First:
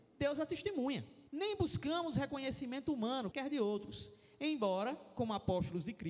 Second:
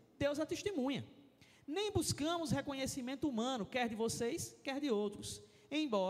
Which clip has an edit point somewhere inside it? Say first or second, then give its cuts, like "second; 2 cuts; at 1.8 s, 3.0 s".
first; 2 cuts; at 1.3 s, 3.3 s